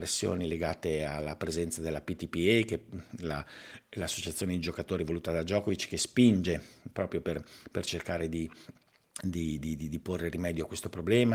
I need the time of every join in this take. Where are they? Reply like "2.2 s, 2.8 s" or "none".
none